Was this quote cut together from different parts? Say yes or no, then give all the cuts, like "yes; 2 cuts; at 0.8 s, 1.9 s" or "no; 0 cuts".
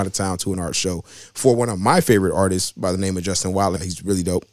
no; 0 cuts